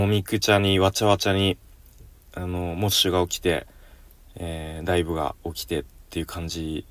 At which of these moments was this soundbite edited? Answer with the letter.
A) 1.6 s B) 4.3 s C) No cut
C